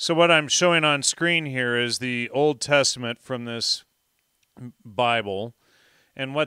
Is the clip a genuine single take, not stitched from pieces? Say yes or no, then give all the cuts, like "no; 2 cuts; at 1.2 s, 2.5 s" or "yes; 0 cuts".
yes; 0 cuts